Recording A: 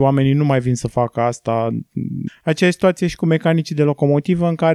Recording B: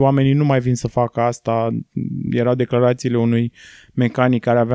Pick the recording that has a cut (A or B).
A